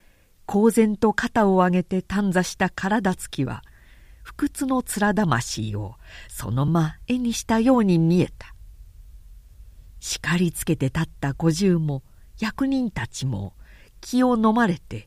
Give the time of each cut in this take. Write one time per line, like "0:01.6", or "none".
0:06.7